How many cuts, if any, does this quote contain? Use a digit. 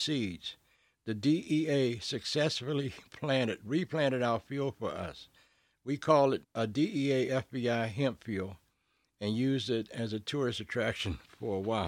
1